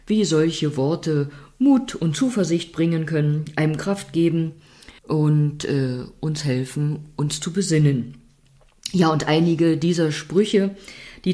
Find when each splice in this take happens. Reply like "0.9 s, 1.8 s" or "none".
5.0 s